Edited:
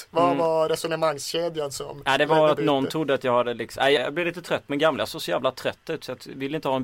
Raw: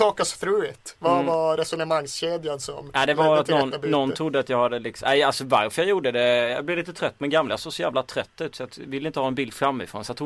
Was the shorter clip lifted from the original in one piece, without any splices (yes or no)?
no